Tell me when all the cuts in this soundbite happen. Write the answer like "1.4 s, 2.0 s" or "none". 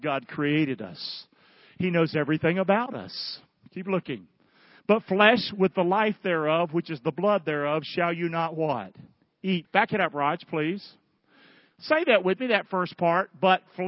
9.6 s